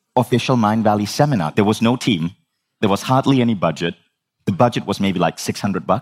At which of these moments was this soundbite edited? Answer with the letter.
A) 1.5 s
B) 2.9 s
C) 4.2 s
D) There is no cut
A